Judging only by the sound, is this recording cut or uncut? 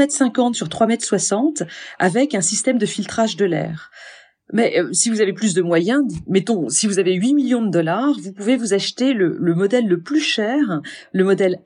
uncut